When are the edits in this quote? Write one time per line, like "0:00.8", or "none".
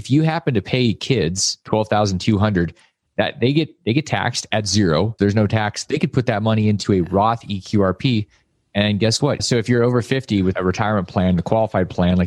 0:05.2
0:09.4

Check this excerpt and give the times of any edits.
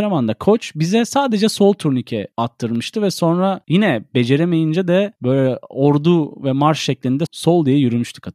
0:07.3

